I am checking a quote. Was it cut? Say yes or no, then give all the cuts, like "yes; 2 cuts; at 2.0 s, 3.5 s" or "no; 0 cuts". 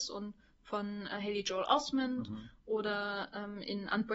no; 0 cuts